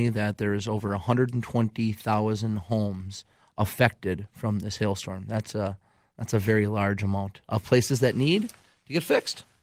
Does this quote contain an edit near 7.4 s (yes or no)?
yes